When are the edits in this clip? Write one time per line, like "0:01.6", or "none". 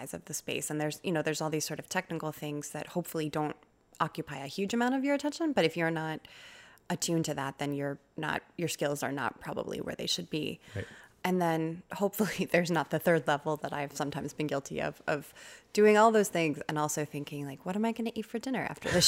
none